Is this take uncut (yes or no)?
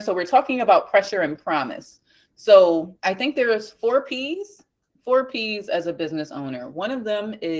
no